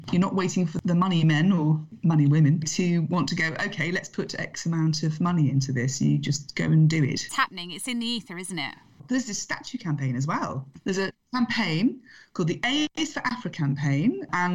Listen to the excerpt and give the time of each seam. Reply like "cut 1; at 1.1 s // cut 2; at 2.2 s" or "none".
none